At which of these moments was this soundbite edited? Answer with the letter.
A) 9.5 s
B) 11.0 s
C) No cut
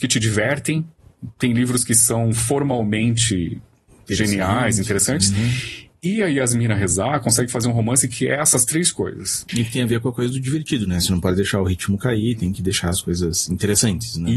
A